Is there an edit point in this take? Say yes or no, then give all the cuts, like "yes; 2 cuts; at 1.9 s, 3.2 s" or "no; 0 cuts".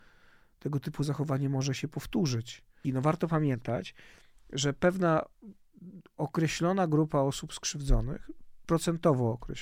yes; 1 cut; at 2.8 s